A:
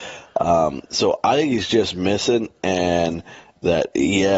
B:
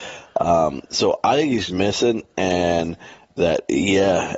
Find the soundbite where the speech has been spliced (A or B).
B